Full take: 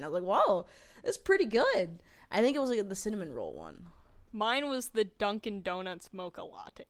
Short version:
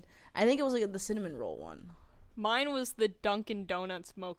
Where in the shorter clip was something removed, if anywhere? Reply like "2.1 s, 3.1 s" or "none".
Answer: none